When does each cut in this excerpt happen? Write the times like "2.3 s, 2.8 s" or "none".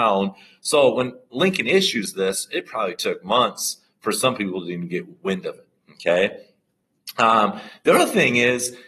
none